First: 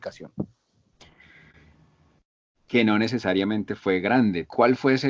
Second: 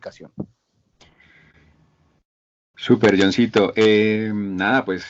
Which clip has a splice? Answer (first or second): first